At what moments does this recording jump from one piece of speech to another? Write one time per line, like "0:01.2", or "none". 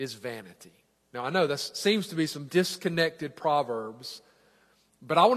0:02.5